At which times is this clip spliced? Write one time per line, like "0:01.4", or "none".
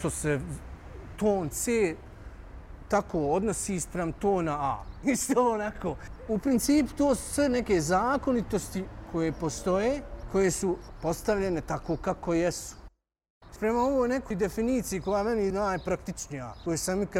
0:05.0
0:13.6